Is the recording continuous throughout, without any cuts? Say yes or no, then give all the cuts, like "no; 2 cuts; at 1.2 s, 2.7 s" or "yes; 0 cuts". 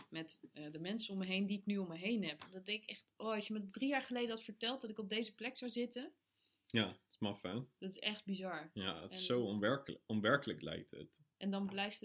yes; 0 cuts